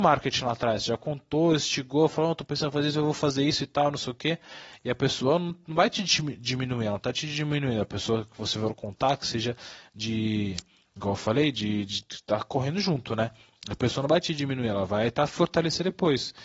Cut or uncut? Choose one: uncut